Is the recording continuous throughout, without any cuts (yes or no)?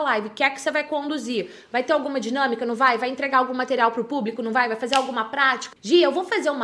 no